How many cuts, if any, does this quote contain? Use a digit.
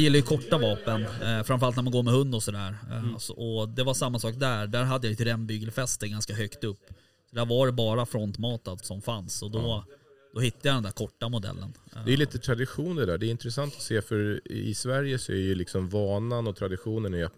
1